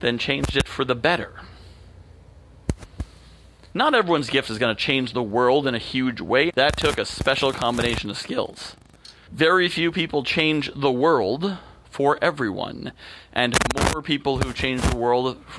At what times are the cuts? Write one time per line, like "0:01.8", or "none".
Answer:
0:03.7
0:06.5
0:09.3